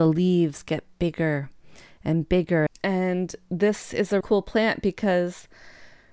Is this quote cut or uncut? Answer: cut